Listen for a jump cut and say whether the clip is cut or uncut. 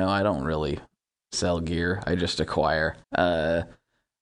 cut